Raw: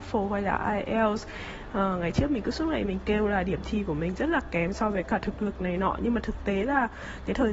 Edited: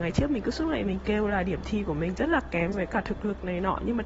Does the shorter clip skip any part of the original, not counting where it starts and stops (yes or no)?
yes